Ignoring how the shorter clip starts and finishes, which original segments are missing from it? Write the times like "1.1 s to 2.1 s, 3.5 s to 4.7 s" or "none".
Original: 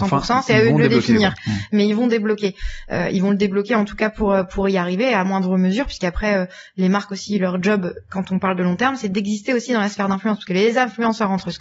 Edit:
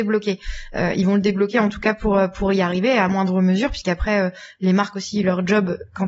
none

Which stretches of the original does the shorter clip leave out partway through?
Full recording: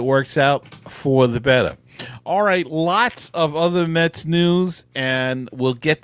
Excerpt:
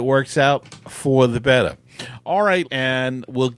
2.6 s to 4.9 s

